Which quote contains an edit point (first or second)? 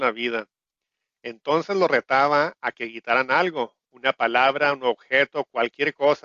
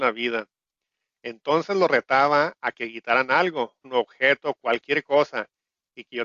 second